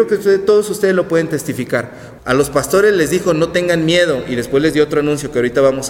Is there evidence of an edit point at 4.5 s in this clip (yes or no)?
no